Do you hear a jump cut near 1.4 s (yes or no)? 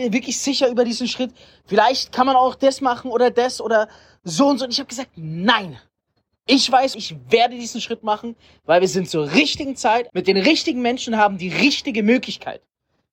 no